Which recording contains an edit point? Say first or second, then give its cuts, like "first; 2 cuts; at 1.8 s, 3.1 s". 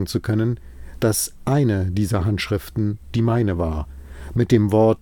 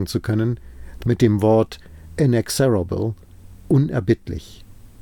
second; 1 cut; at 1.0 s